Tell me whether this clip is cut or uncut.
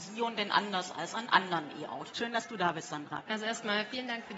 cut